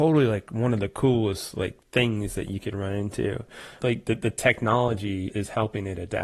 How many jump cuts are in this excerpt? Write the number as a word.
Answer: two